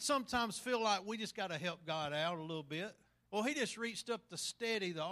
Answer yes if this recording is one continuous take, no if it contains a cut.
no